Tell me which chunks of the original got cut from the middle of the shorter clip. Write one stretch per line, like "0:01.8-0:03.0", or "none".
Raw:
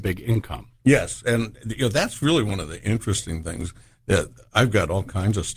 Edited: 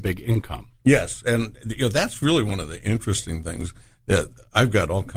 none